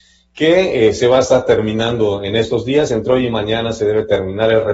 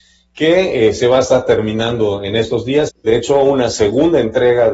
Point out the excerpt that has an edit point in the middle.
second; 1 cut; at 2.9 s

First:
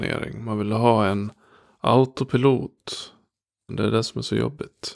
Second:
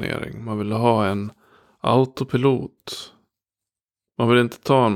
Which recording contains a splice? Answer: first; 1 cut; at 3.7 s

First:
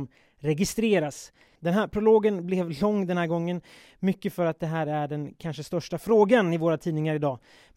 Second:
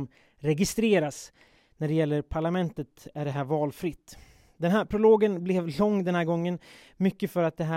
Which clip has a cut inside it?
first; 1 cut; at 1.6 s

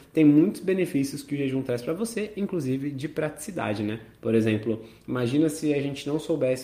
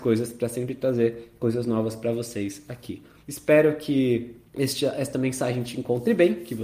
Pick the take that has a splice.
second; 2 cuts; at 3.2 s, 4.5 s

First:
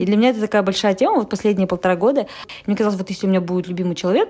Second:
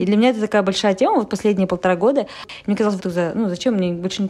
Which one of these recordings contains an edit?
second; 1 cut; at 3.0 s

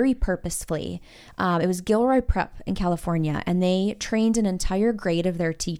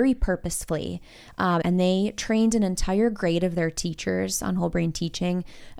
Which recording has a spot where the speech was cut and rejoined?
second; 1 cut; at 1.6 s

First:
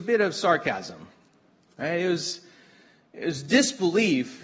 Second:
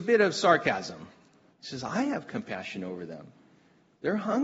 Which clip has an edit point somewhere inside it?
second; 1 cut; at 1.5 s

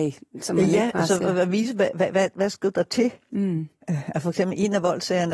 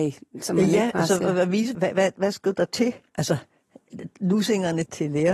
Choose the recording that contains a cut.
second; 2 cuts; at 1.7 s, 3.1 s

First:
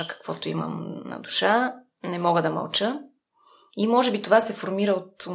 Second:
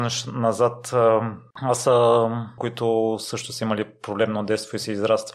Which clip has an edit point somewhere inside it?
second; 2 cuts; at 1.5 s, 2.6 s

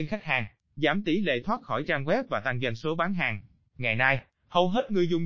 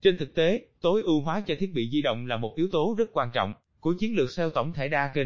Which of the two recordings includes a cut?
first; 1 cut; at 3.7 s

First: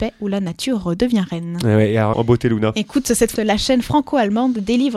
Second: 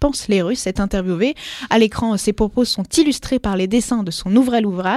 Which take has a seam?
first; 2 cuts; at 2.1 s, 3.4 s

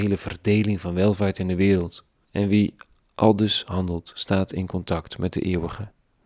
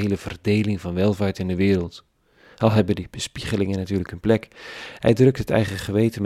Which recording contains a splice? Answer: first; 1 cut; at 2.2 s

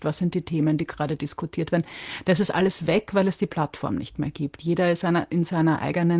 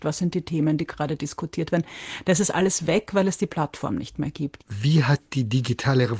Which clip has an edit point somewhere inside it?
second; 1 cut; at 4.6 s

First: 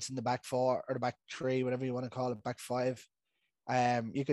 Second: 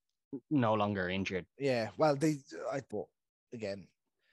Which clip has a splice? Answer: second; 2 cuts; at 1.5 s, 2.9 s

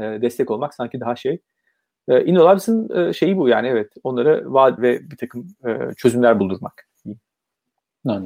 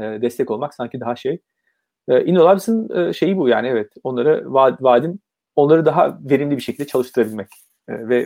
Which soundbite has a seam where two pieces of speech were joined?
first; 1 cut; at 4.8 s

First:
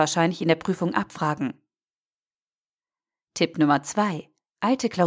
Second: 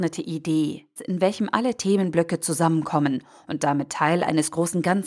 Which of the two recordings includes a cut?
second; 1 cut; at 1.0 s

